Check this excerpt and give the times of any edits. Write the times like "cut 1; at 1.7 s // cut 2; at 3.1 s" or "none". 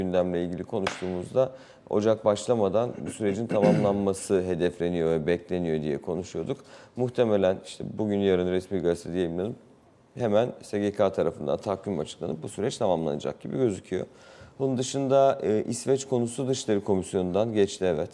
none